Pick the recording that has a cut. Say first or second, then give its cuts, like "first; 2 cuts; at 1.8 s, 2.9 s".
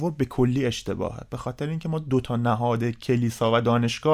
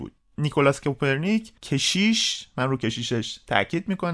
second; 1 cut; at 1.6 s